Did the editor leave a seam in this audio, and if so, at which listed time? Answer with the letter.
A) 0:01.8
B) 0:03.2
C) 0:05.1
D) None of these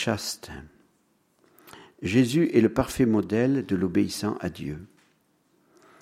D